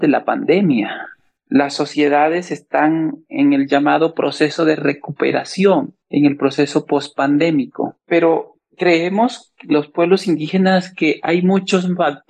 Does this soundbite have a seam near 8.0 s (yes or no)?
no